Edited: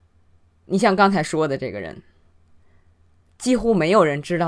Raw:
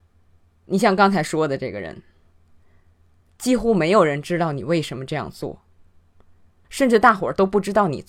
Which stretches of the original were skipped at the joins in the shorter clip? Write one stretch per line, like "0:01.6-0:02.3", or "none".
none